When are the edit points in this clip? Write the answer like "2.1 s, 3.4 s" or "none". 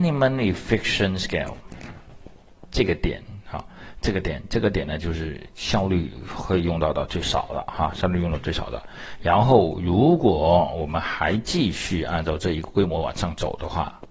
none